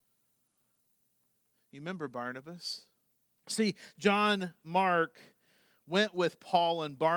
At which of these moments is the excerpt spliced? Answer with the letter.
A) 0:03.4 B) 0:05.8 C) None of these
A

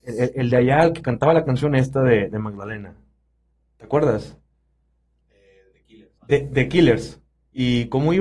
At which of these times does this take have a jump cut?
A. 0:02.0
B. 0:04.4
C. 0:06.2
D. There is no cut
C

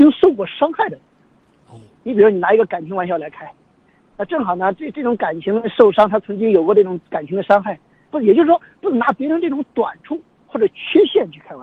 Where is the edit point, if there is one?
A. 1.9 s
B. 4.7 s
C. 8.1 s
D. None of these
C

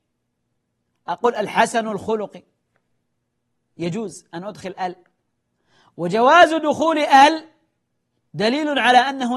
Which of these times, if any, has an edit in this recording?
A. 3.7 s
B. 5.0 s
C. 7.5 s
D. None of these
D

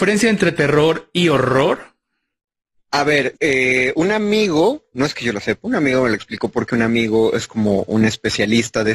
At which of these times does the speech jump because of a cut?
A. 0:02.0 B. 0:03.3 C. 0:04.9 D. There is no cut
B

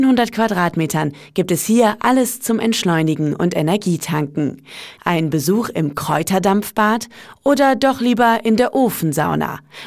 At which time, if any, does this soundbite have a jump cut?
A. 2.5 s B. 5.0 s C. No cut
B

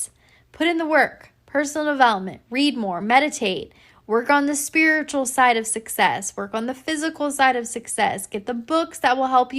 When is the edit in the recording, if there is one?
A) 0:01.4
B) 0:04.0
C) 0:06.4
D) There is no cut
D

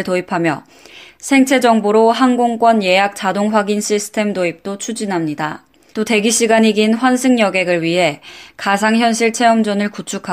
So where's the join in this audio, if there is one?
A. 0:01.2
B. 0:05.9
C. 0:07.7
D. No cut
B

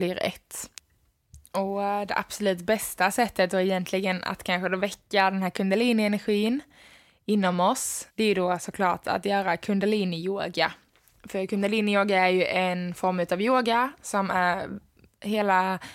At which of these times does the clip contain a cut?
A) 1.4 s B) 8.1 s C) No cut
B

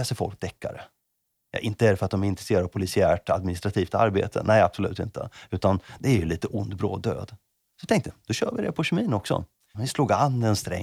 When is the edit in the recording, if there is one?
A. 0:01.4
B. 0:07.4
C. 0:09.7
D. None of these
C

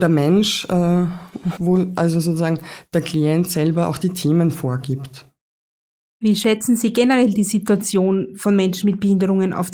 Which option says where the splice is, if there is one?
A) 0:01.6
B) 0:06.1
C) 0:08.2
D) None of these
A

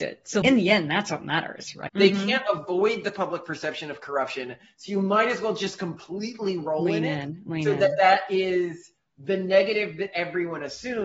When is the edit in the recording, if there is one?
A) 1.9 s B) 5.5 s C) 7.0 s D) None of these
A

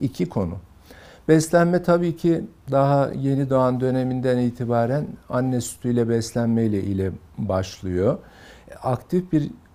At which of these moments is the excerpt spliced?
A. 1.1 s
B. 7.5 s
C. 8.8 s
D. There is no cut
D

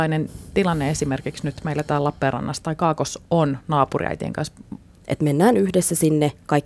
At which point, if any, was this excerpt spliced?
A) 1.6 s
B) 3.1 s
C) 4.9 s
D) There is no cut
C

